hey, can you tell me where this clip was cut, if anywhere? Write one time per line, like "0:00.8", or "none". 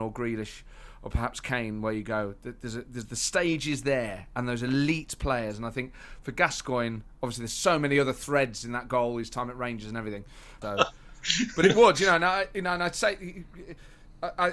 0:10.6

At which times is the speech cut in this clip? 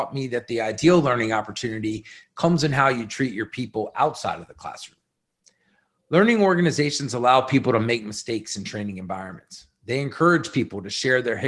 none

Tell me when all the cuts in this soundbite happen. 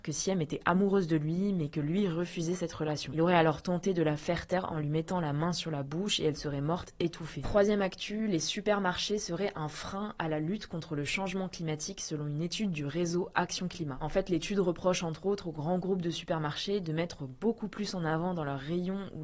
0:07.4

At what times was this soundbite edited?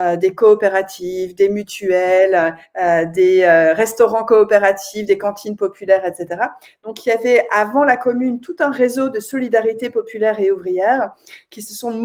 none

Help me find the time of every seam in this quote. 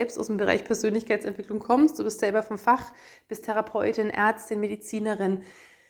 none

